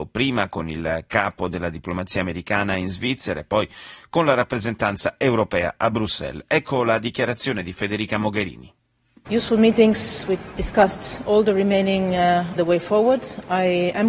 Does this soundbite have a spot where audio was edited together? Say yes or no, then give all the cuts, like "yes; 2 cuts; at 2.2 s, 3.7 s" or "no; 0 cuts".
yes; 1 cut; at 12.6 s